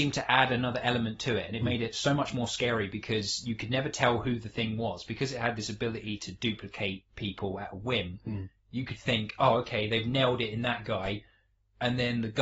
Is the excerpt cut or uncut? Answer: uncut